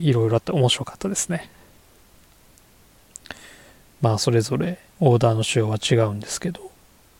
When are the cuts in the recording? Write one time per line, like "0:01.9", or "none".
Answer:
0:03.8